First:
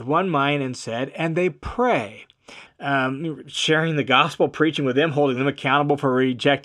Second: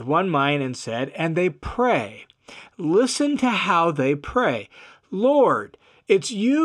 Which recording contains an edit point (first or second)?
first